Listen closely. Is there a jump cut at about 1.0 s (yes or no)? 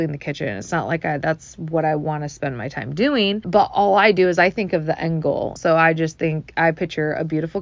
no